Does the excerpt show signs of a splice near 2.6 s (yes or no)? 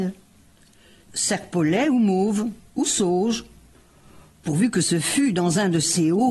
no